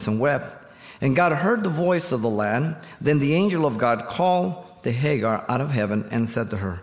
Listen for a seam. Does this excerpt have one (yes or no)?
no